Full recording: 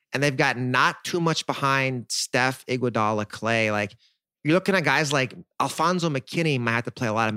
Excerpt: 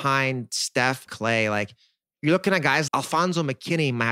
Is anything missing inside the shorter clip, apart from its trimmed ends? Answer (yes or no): yes